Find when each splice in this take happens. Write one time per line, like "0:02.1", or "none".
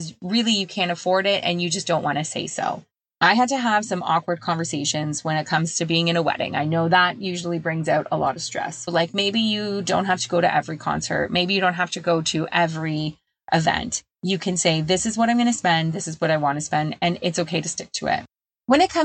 0:08.9